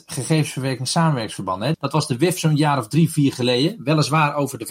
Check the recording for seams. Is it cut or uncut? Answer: cut